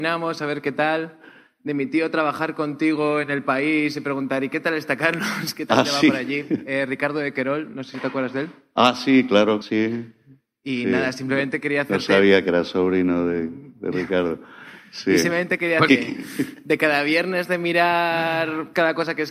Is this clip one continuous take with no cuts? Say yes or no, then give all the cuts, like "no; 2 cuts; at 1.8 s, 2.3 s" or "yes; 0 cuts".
no; 2 cuts; at 9.6 s, 15.9 s